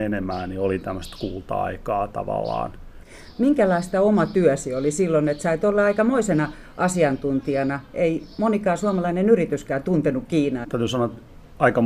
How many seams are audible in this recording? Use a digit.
1